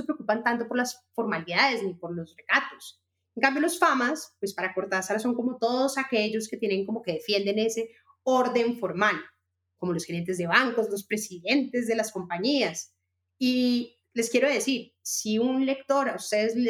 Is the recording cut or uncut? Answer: uncut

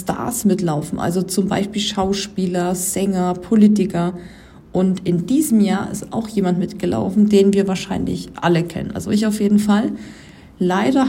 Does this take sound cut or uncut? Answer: uncut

